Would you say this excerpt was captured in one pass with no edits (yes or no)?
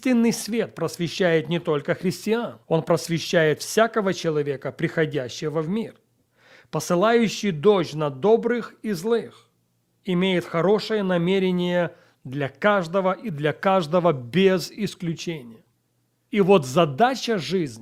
no